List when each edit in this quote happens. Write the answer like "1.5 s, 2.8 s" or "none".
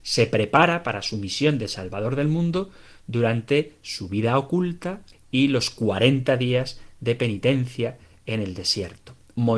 5.1 s

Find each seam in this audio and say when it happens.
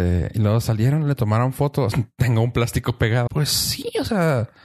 1.9 s, 3.3 s

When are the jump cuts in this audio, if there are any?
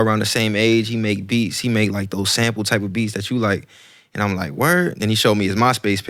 none

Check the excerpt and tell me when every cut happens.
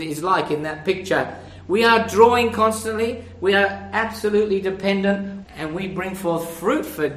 5.4 s

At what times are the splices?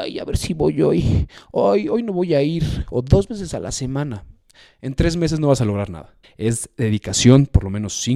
6.2 s

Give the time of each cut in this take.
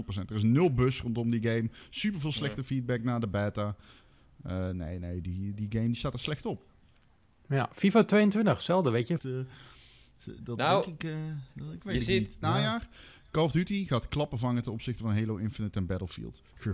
9.2 s, 12.4 s

